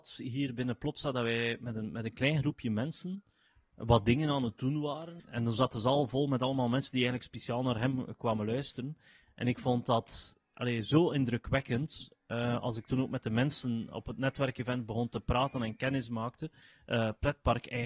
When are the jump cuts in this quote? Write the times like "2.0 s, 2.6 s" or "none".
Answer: 5.2 s